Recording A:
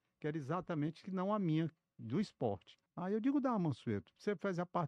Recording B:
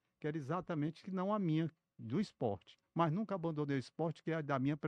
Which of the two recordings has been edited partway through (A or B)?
A